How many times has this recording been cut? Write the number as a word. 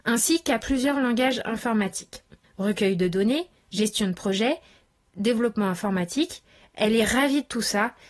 one